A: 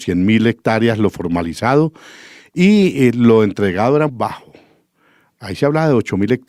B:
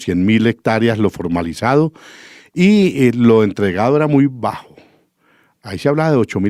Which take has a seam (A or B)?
A